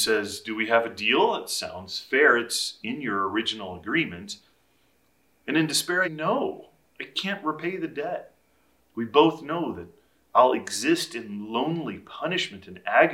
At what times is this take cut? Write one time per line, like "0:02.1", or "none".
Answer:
0:06.0
0:08.8